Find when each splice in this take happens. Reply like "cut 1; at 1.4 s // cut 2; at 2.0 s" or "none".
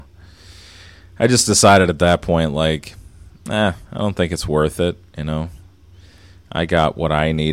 none